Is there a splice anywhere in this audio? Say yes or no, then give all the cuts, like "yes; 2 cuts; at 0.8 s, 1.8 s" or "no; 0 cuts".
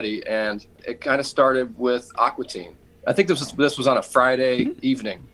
yes; 1 cut; at 2.9 s